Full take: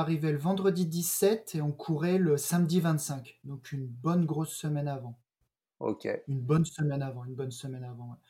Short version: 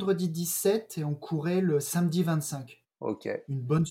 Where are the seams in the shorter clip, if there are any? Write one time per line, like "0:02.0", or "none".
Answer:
0:02.8

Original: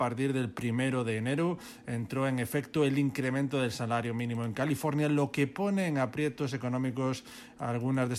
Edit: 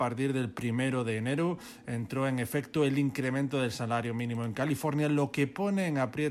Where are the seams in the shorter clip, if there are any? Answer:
none

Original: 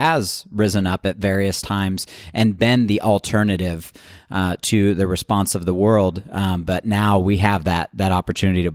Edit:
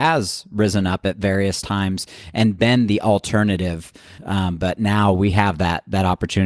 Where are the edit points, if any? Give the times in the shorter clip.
0:04.2

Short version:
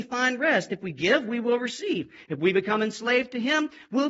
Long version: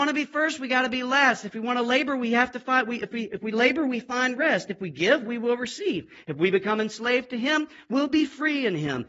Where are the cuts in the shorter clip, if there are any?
none

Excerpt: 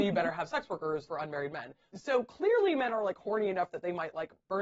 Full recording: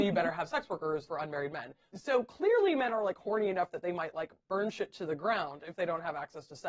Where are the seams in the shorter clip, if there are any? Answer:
none

